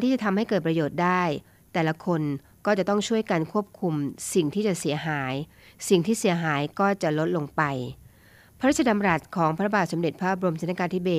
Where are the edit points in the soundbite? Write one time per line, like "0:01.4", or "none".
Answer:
none